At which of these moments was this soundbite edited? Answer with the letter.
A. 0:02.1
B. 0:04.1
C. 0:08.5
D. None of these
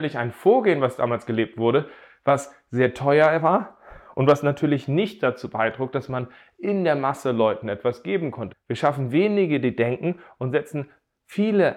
C